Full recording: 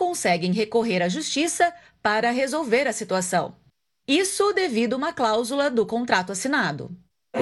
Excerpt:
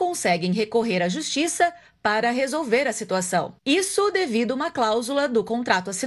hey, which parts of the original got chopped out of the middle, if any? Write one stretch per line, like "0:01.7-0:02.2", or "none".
0:03.6-0:04.0